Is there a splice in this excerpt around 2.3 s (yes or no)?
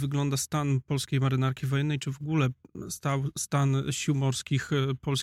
no